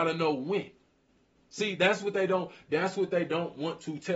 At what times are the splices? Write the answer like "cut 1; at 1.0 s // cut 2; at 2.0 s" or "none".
none